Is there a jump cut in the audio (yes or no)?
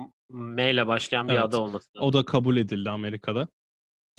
no